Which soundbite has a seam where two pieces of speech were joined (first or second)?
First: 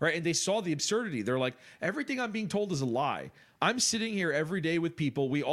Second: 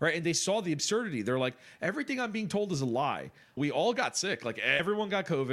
second